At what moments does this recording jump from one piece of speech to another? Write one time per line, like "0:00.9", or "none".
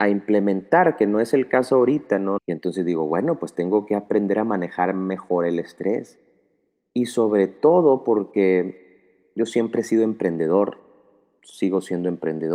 0:02.4

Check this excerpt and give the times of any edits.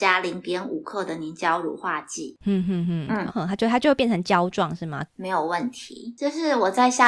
0:03.3
0:05.1

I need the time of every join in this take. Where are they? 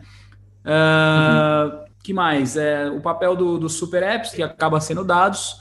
0:01.9
0:04.3

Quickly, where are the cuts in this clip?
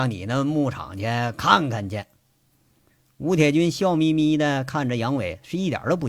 none

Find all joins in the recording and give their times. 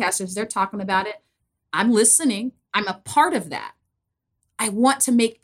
none

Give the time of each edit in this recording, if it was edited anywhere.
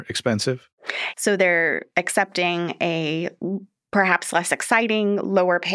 0:01.1

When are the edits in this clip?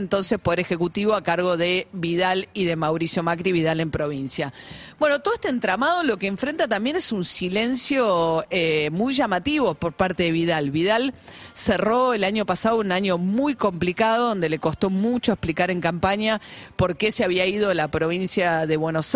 none

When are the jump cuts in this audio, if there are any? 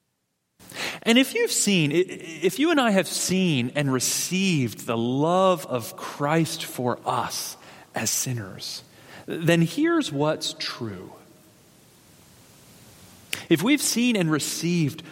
none

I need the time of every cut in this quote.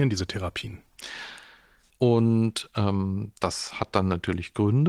0:01.9

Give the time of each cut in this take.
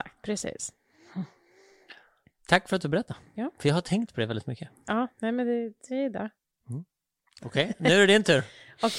none

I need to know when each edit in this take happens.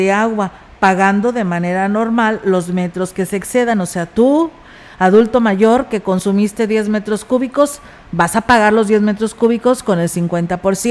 none

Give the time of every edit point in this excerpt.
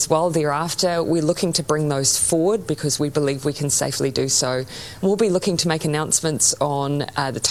none

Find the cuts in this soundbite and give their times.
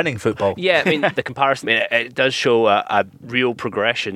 0:01.6

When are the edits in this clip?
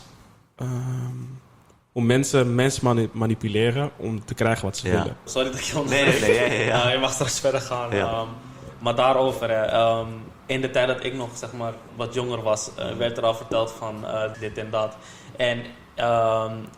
0:05.3
0:11.9
0:14.3

